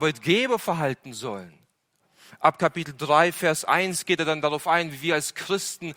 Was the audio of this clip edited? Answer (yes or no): no